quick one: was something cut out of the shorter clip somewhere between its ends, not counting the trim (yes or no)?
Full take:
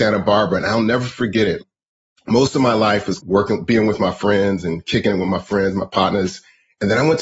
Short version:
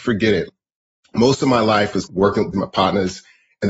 yes